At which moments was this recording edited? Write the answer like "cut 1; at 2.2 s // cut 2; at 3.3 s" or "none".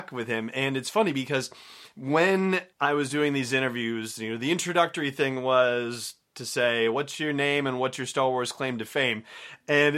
cut 1; at 2.7 s